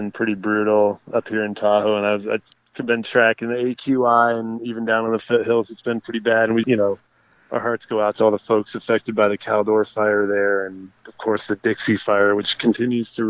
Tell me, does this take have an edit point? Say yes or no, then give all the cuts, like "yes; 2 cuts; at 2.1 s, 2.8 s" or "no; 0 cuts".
yes; 2 cuts; at 6.6 s, 11.0 s